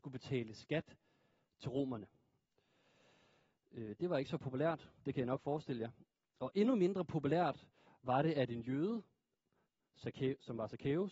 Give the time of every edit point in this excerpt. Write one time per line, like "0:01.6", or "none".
none